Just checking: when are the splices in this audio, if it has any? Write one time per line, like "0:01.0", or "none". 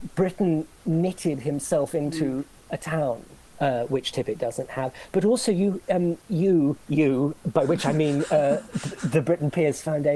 0:03.5